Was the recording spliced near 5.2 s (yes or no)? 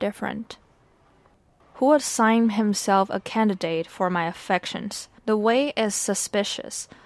yes